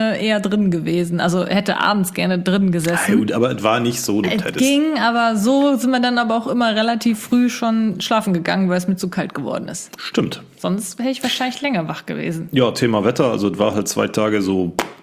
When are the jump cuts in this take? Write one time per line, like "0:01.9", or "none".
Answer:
0:04.2